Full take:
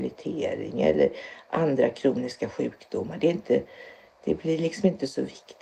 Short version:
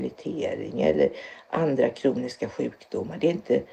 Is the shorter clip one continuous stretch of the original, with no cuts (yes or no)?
yes